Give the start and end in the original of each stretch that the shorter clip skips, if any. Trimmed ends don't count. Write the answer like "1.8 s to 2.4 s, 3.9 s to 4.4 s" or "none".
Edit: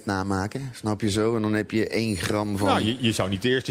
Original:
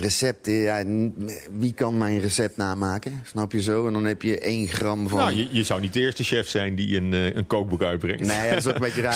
none